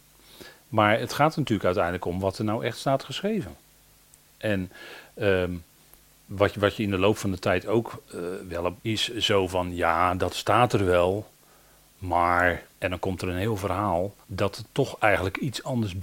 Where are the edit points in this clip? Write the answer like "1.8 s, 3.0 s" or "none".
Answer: 8.8 s, 12.7 s, 14.2 s